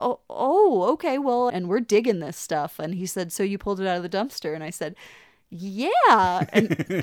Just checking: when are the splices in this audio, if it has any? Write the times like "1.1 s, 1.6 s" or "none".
1.5 s